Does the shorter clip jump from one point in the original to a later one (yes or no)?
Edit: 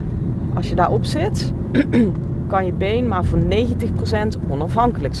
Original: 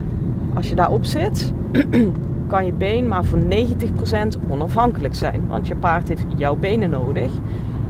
no